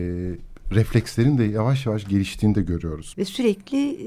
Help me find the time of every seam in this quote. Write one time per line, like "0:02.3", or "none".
0:03.1